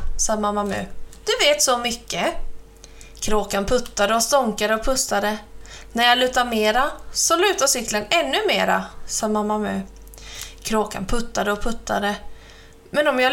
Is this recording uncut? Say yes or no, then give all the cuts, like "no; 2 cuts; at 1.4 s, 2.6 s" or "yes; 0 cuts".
no; 1 cut; at 3.1 s